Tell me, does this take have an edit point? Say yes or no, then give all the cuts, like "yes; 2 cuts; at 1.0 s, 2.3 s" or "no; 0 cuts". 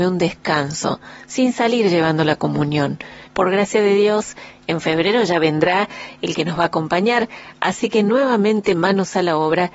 yes; 1 cut; at 3.3 s